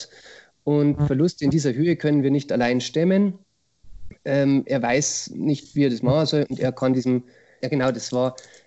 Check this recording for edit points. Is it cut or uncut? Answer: cut